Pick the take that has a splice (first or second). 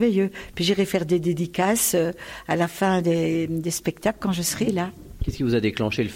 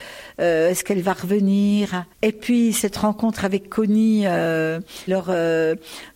second